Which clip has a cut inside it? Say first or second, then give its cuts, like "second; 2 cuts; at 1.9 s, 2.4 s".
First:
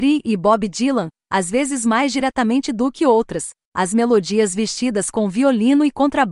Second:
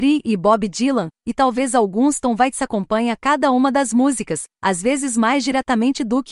first; 2 cuts; at 1.2 s, 3.7 s